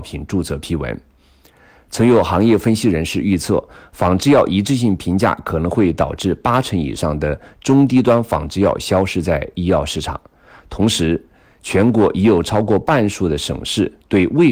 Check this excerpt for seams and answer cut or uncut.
uncut